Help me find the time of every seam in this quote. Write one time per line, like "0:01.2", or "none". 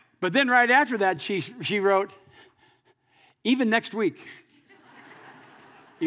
none